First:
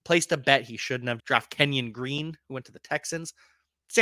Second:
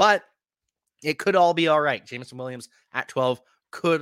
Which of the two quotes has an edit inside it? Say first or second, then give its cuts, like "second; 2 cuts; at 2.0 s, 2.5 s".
first; 1 cut; at 1.2 s